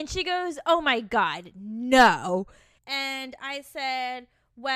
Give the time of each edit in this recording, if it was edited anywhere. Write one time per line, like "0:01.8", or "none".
0:02.8

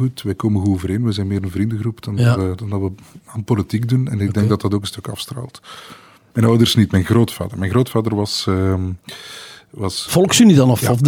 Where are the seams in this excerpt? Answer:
0:06.3

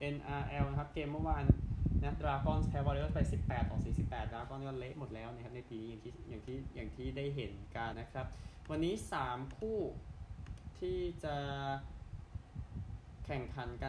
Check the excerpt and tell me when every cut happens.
0:07.9

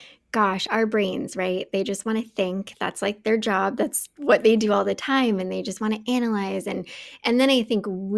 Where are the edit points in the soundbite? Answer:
none

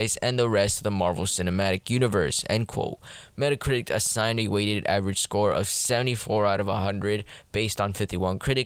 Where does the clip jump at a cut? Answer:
none

